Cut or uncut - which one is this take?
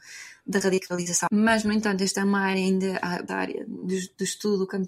cut